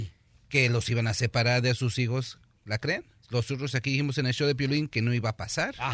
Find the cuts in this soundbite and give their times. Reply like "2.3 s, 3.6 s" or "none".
3.2 s